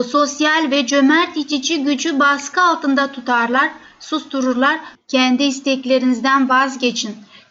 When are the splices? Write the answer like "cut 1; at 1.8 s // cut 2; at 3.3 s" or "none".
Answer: cut 1; at 5.0 s